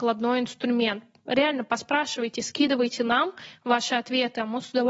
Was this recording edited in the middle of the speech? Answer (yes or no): no